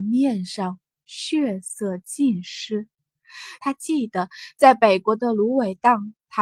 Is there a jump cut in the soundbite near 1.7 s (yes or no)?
no